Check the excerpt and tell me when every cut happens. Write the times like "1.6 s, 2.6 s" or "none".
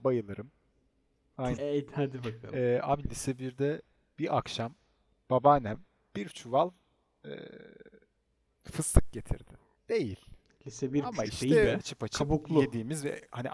1.6 s, 9.8 s, 11.8 s